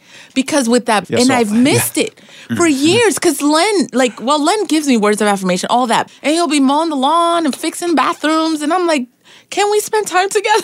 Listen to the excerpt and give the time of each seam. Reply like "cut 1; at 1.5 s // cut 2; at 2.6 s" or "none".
cut 1; at 1.0 s // cut 2; at 6.1 s